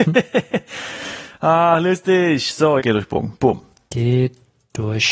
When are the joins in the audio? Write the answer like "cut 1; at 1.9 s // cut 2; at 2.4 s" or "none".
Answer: cut 1; at 2.8 s